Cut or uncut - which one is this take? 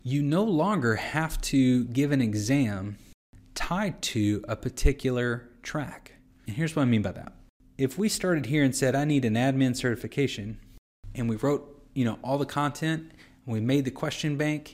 uncut